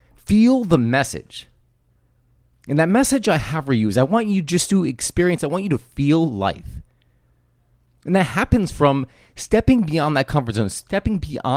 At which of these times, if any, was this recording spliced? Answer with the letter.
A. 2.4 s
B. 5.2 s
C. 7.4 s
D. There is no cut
D